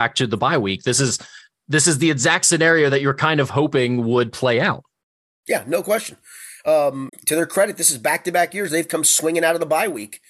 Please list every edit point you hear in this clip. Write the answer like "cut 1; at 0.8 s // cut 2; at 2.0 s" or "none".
cut 1; at 7.1 s